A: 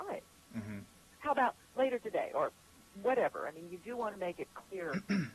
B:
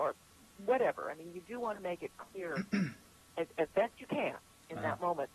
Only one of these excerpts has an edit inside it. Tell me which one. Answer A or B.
A